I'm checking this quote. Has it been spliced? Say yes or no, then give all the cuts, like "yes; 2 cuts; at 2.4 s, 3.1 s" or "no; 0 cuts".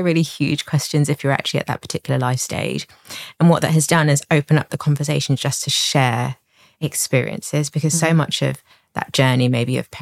no; 0 cuts